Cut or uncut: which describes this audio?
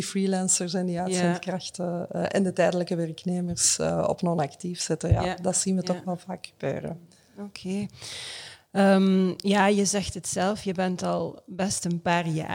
uncut